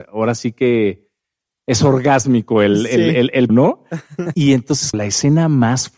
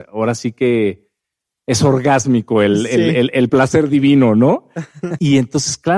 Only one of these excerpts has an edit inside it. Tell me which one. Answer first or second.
first